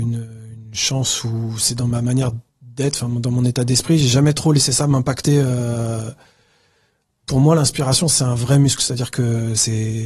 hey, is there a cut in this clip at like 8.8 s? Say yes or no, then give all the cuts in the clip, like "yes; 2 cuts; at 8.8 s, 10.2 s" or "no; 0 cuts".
no; 0 cuts